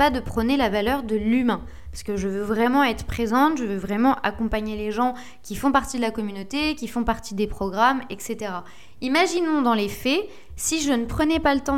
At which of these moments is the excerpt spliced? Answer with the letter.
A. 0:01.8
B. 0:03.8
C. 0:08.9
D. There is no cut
D